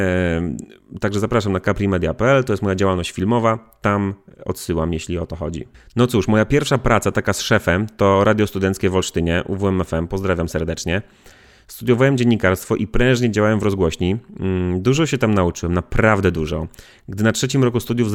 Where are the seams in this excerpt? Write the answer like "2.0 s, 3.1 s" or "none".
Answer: none

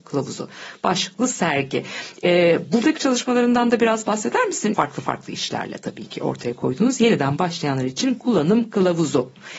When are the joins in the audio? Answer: 4.7 s

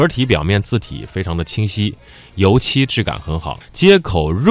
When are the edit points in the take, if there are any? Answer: 3.6 s

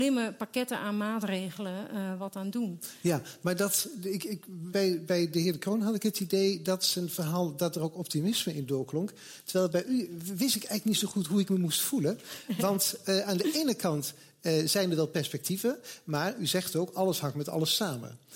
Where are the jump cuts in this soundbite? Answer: 4.7 s

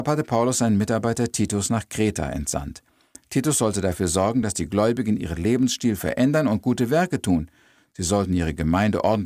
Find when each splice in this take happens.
none

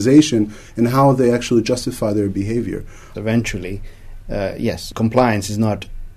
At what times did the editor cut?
3.1 s

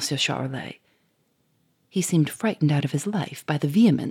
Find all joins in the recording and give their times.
none

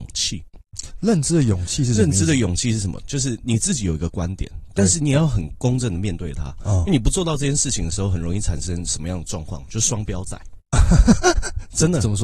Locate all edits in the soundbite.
3.0 s

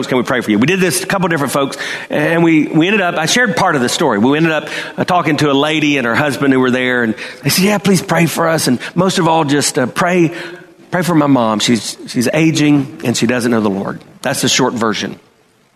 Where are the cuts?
none

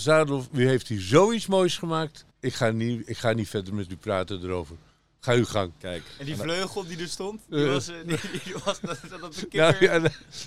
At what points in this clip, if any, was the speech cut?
2.3 s

